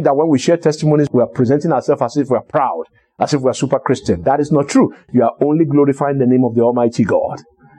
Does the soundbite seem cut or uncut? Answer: uncut